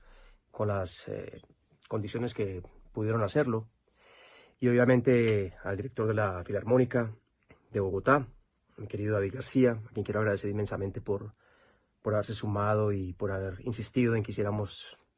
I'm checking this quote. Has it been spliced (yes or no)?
no